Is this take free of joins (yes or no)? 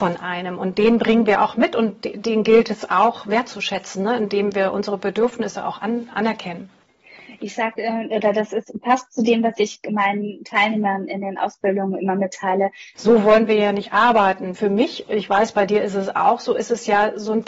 no